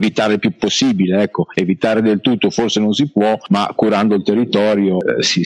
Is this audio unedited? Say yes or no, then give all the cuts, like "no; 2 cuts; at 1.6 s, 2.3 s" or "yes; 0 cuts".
yes; 0 cuts